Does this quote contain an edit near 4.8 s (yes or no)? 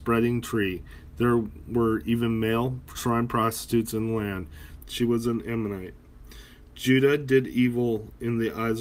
yes